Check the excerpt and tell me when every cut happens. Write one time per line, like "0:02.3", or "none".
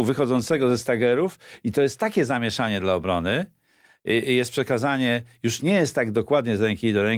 none